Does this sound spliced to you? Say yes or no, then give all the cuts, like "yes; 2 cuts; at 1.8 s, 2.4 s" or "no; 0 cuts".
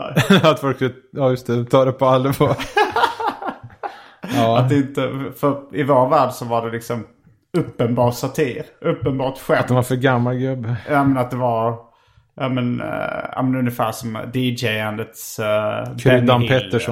no; 0 cuts